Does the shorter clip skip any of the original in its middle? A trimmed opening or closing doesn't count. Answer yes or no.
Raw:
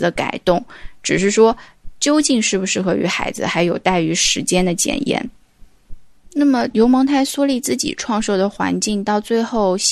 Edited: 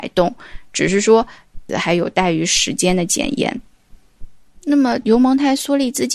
yes